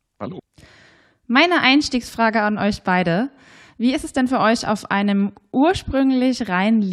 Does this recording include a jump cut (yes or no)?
no